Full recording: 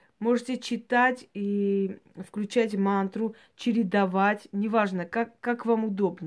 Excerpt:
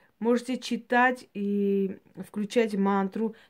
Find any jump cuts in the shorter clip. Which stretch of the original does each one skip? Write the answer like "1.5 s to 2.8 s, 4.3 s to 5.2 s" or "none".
none